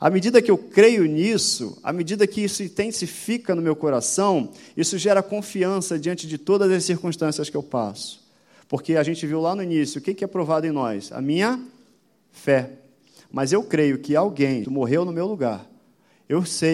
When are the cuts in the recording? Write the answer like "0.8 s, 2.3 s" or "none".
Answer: 14.6 s